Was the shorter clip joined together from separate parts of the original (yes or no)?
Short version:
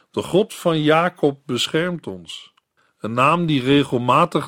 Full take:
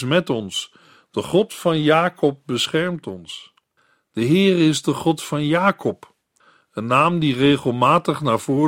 yes